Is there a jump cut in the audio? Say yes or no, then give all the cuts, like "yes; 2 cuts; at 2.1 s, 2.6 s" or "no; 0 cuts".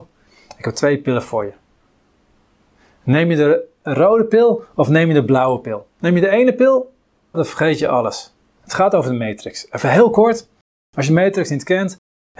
yes; 2 cuts; at 7.3 s, 8.6 s